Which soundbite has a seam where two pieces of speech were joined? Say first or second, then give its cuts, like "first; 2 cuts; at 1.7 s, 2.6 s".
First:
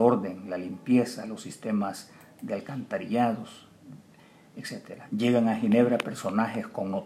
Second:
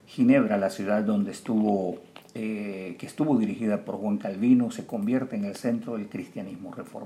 first; 1 cut; at 5.1 s